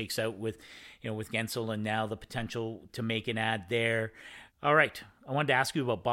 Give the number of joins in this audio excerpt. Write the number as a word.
two